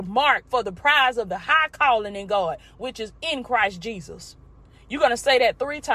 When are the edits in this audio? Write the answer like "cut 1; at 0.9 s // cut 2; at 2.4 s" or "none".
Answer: none